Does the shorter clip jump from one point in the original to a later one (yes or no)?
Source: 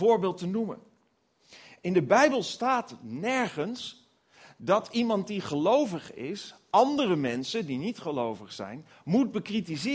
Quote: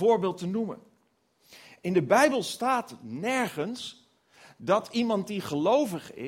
no